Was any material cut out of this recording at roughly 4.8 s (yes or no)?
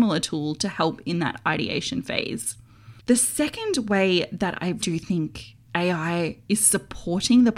yes